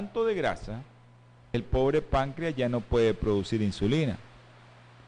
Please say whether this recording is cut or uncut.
cut